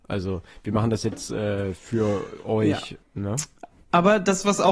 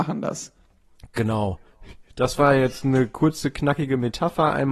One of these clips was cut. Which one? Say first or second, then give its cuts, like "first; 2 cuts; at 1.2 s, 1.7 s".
first; 1 cut; at 3.0 s